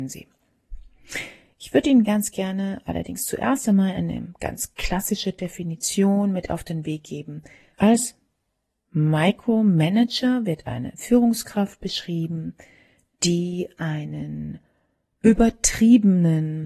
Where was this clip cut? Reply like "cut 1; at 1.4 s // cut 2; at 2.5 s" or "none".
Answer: cut 1; at 7.7 s